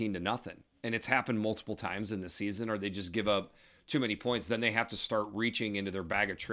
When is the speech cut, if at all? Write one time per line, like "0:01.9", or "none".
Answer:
none